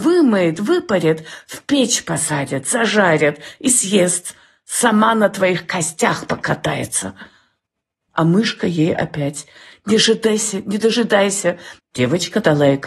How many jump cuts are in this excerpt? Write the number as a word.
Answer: two